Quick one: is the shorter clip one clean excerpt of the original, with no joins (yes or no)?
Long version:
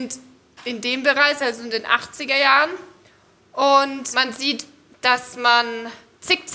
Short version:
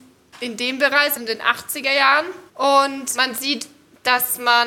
no